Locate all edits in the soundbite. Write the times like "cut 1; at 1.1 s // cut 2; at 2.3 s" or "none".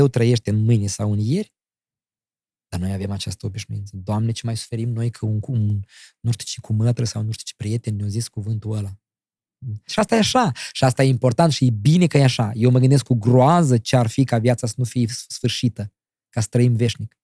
cut 1; at 9.9 s

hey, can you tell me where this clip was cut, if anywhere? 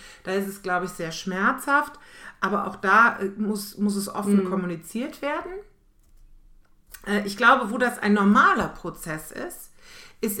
none

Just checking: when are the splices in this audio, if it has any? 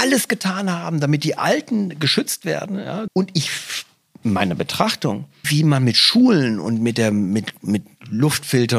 cut 1; at 3.1 s // cut 2; at 5.4 s

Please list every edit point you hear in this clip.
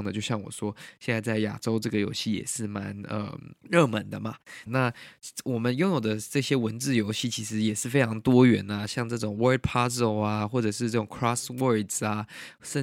cut 1; at 3.6 s // cut 2; at 4.7 s

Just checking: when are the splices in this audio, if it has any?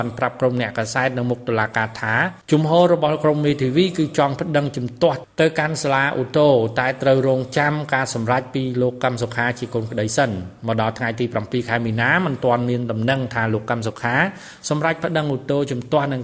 cut 1; at 2.4 s

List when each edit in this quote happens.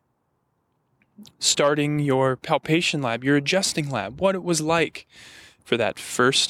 none

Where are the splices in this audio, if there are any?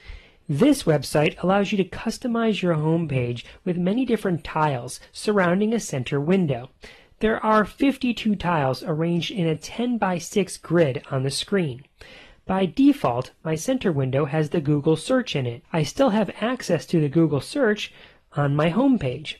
cut 1; at 15.6 s

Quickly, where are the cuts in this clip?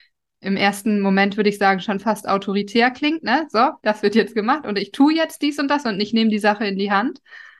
cut 1; at 3.8 s

